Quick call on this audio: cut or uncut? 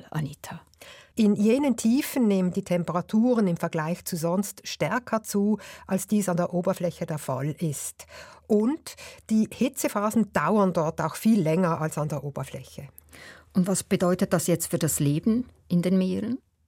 cut